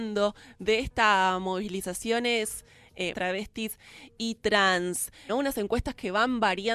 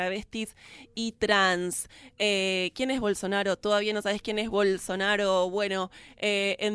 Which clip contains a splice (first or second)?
first